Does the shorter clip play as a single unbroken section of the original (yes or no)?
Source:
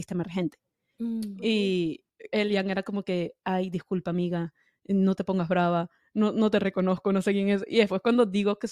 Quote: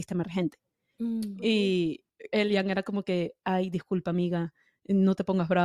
yes